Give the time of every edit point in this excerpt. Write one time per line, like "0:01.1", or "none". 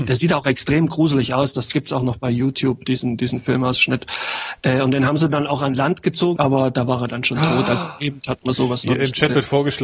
0:06.4